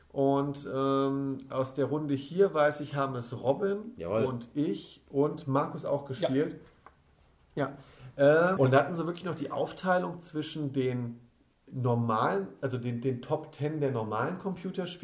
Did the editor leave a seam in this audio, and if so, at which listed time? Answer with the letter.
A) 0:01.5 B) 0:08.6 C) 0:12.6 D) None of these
B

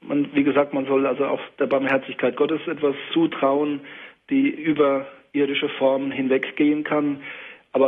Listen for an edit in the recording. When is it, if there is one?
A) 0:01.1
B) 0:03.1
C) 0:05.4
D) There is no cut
B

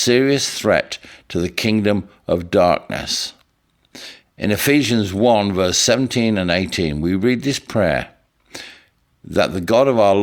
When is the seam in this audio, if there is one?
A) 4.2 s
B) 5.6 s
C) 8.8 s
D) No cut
D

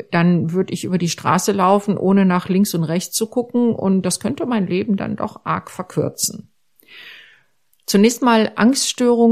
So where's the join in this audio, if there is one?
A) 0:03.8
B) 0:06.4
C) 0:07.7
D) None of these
C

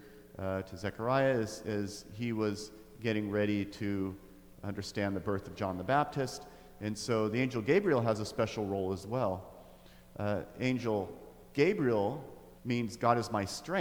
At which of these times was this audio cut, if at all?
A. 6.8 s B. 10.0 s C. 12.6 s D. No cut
C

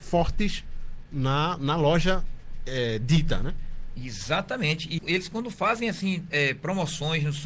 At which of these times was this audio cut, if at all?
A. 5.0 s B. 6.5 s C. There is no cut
A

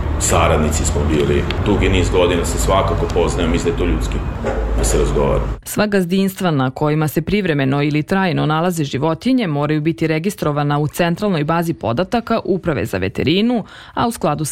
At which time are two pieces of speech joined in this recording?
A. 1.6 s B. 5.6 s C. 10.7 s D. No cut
B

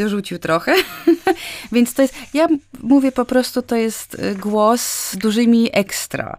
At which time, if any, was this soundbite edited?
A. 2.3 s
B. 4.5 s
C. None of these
C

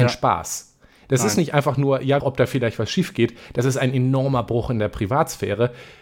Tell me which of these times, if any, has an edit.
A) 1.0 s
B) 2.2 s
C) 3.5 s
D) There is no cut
B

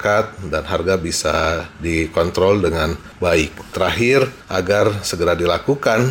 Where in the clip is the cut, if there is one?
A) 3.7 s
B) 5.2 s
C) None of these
C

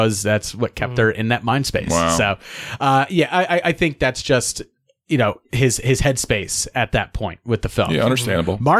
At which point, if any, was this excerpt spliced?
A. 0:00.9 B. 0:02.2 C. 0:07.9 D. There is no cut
D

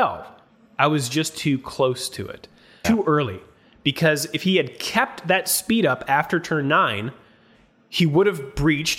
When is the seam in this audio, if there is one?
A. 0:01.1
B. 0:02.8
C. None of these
B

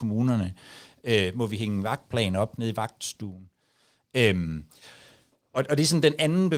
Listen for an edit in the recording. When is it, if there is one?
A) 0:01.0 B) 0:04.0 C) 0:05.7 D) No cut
A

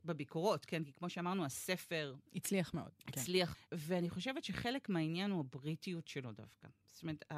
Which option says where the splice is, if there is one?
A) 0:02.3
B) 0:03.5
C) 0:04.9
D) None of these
B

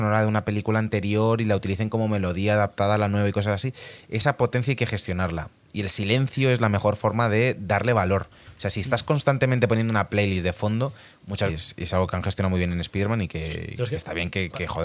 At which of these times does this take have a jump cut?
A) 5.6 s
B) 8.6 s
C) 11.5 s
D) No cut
C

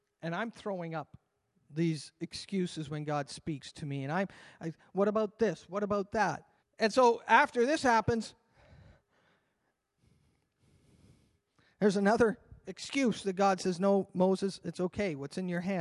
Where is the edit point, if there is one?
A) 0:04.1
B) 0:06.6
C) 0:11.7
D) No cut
B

